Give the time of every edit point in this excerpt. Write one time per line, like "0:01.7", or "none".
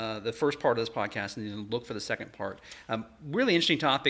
none